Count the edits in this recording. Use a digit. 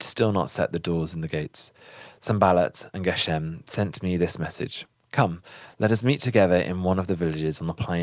0